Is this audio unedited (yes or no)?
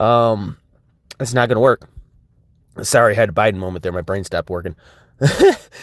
yes